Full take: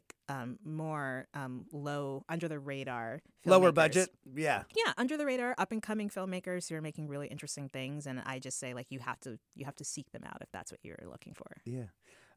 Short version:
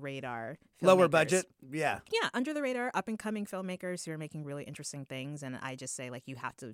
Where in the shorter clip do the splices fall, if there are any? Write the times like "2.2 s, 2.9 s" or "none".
none